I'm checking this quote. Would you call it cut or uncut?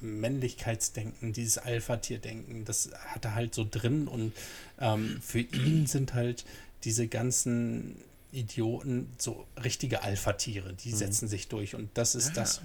uncut